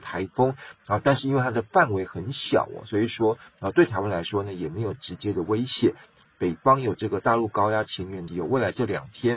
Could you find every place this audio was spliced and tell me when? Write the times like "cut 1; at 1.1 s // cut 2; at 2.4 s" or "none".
cut 1; at 6.2 s // cut 2; at 8.3 s